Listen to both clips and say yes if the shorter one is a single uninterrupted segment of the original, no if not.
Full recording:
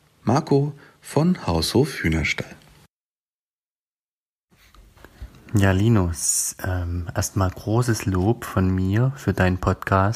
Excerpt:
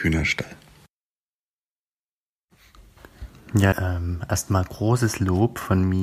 no